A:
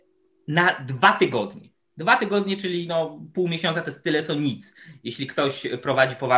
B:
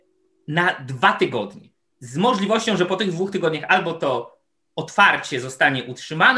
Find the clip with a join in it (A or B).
B